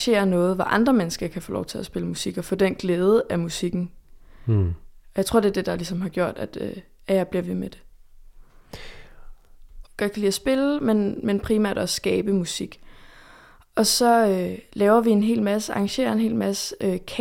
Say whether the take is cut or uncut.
cut